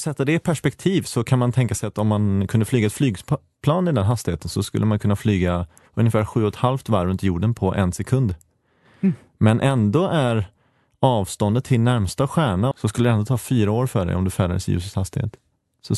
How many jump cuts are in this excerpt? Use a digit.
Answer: 1